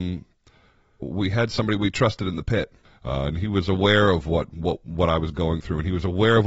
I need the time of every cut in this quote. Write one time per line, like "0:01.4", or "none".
0:01.0
0:02.8